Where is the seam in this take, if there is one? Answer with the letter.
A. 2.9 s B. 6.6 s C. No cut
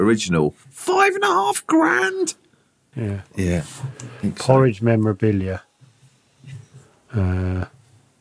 A